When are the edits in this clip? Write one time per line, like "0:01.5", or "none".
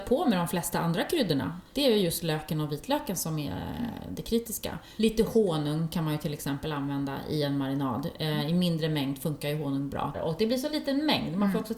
0:10.1

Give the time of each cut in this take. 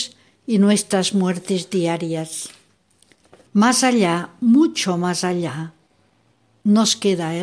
0:03.5

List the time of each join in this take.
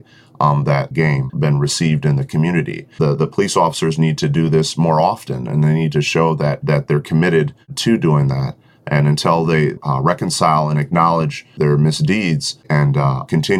0:01.3

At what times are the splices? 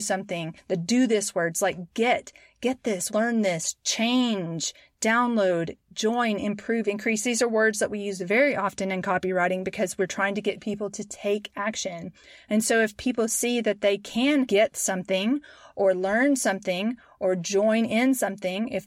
0:03.1

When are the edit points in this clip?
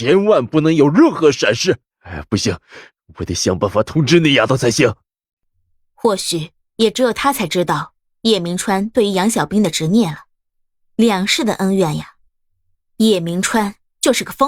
0:01.9

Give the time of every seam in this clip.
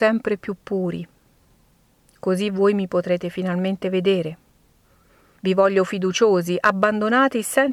0:05.4

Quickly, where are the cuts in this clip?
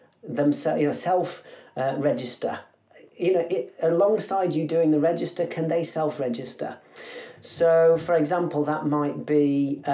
none

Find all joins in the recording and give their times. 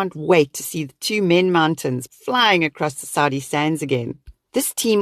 0:02.1

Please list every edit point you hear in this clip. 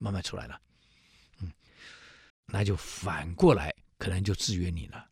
0:02.3

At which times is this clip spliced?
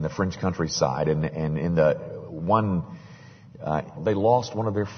0:04.0

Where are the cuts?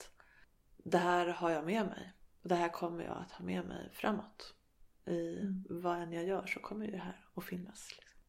none

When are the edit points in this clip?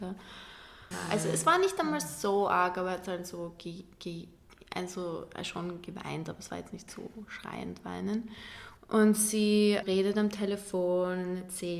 0:00.9
0:08.8
0:09.8

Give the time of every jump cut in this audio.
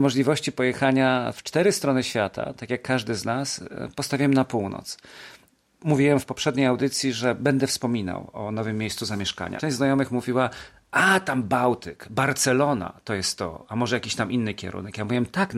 0:09.6

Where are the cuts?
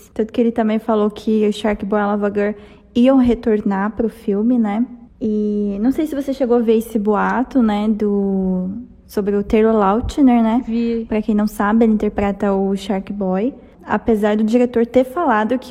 0:13.7

